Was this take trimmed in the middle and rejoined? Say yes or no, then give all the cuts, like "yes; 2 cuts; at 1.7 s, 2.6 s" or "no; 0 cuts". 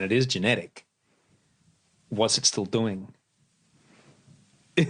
no; 0 cuts